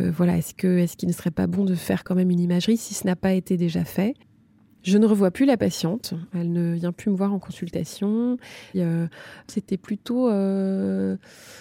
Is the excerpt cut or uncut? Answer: cut